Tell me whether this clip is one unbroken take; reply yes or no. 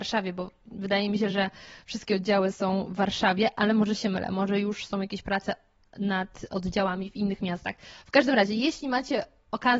yes